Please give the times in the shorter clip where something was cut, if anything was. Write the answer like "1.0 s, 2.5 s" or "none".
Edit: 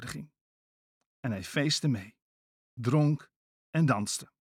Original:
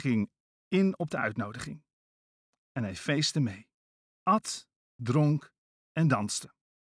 2.6 s